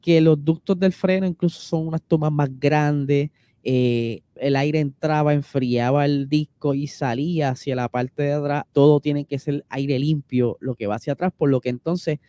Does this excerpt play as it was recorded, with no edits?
no; 2 cuts; at 4.4 s, 8.7 s

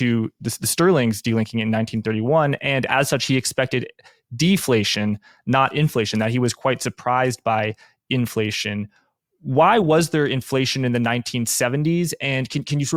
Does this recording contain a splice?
no; 0 cuts

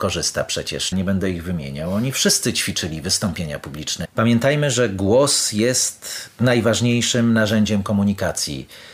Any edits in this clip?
yes; 2 cuts; at 0.9 s, 4.0 s

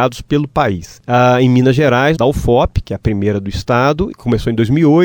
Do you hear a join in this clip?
yes; 2 cuts; at 2.2 s, 4.1 s

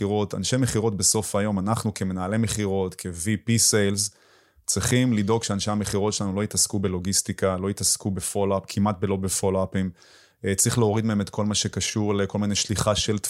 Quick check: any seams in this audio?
no; 0 cuts

